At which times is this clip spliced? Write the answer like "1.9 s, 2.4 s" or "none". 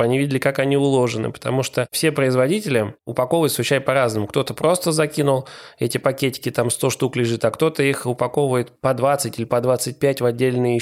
none

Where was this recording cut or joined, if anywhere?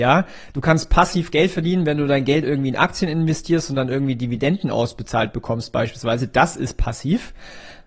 none

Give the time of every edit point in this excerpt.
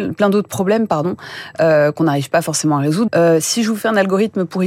3.1 s

